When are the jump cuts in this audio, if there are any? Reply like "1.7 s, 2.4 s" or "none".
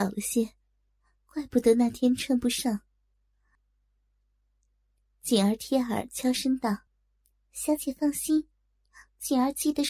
3.6 s, 6.9 s